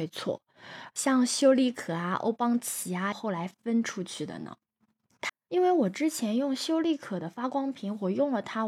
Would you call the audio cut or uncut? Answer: cut